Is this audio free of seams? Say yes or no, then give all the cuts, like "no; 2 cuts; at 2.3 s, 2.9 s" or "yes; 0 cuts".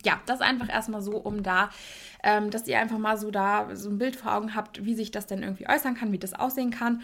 yes; 0 cuts